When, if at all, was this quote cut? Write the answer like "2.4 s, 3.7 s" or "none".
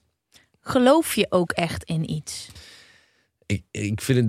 none